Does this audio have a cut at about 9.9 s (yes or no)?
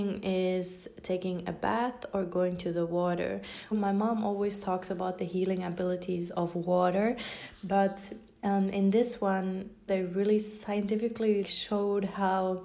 yes